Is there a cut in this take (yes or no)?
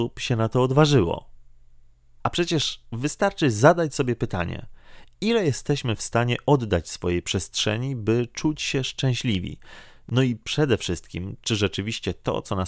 no